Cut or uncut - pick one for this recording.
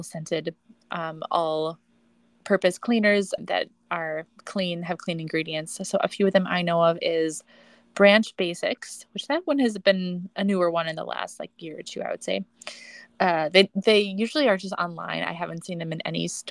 cut